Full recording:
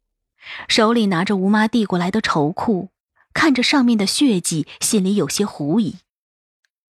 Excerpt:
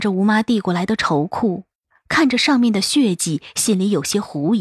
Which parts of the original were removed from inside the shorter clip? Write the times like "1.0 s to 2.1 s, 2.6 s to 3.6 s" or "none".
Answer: none